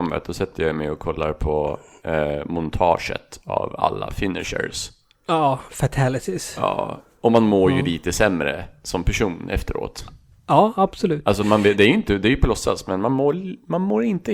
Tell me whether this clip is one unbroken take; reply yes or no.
yes